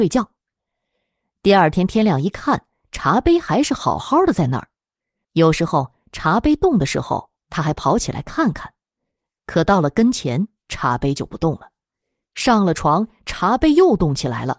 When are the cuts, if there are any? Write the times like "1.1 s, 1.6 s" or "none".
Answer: 5.2 s